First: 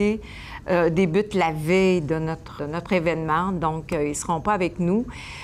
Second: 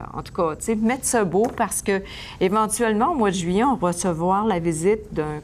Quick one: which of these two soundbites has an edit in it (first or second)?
first